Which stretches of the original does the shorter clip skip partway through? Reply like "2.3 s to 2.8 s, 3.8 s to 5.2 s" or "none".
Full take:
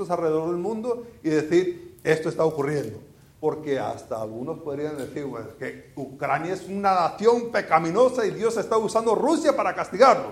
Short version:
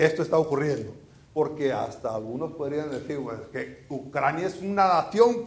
none